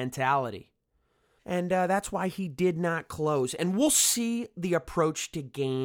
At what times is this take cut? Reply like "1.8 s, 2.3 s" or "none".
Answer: 1.4 s